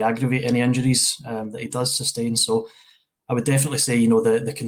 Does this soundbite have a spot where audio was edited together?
no; 0 cuts

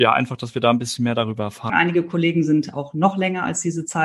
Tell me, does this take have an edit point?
yes; 1 cut; at 1.7 s

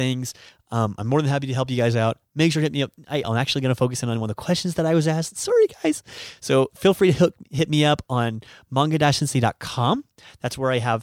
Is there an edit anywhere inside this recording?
yes; 1 cut; at 3.2 s

